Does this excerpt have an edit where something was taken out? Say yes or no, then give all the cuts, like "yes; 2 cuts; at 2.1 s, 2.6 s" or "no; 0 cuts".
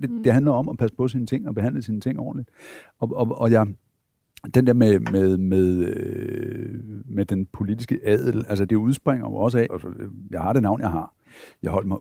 yes; 2 cuts; at 8.7 s, 9.7 s